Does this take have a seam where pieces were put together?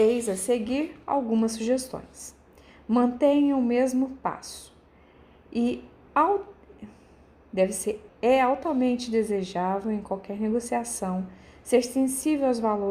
yes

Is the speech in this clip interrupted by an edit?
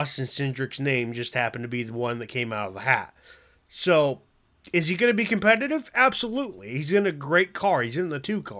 no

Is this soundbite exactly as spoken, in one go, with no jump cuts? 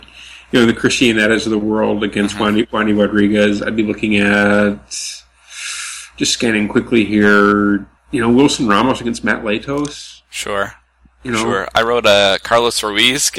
yes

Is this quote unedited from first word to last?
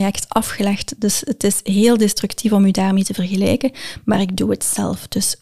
yes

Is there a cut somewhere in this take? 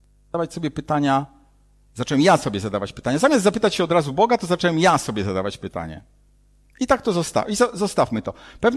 no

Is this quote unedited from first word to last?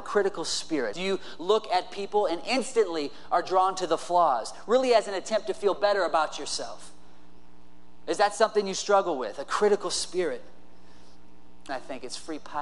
no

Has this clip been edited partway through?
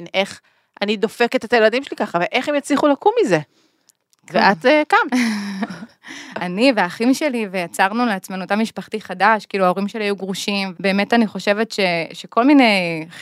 yes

